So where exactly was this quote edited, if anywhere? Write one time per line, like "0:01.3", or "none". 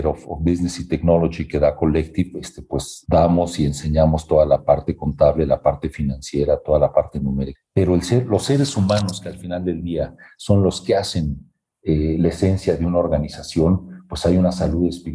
0:07.6